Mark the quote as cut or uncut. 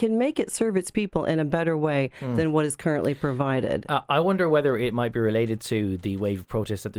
uncut